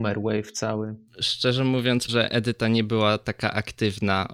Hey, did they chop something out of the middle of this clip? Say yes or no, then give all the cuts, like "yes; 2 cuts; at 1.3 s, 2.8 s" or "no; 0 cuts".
yes; 2 cuts; at 1.1 s, 2.1 s